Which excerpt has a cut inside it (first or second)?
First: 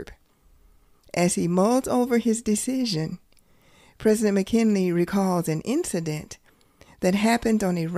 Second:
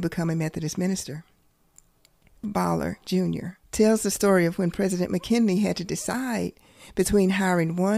second